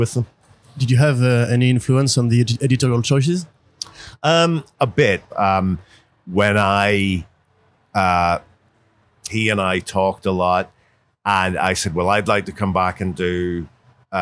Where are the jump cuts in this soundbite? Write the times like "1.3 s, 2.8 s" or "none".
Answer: 5.3 s, 9.3 s